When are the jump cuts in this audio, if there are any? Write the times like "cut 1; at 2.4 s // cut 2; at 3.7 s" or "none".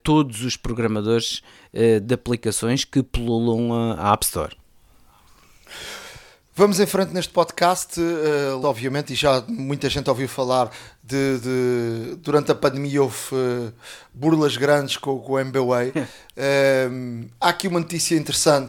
cut 1; at 8.6 s